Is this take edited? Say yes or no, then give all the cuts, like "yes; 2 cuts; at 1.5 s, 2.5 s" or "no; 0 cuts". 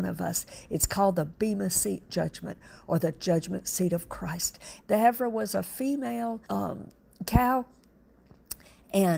yes; 2 cuts; at 4.8 s, 6.5 s